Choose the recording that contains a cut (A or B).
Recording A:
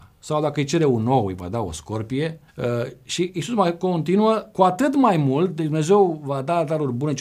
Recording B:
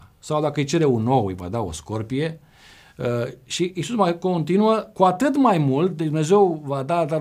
A